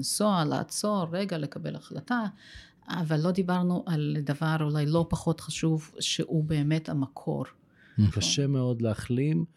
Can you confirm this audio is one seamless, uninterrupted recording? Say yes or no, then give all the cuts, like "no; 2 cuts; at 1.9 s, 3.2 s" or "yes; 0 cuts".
no; 1 cut; at 8.1 s